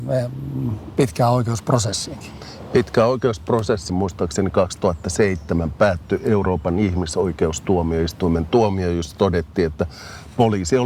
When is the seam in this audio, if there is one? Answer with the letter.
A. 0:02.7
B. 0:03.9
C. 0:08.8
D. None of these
B